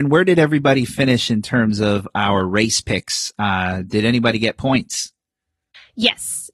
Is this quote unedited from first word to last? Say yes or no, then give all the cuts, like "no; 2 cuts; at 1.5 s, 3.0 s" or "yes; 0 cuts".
yes; 0 cuts